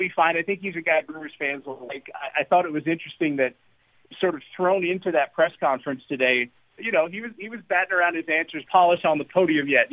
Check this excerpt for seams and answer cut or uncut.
cut